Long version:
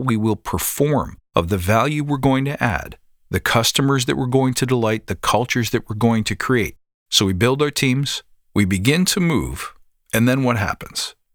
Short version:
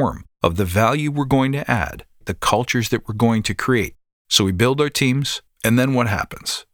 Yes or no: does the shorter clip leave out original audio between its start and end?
yes